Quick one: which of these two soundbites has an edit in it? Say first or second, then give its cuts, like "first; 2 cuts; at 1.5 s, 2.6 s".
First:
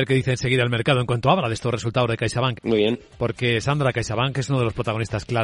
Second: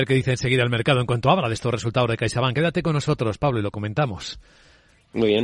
first; 1 cut; at 2.5 s